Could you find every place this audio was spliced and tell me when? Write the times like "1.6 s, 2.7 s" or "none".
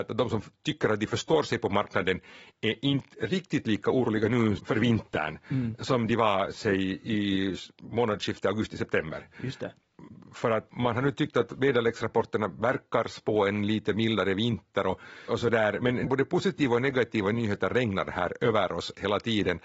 15.3 s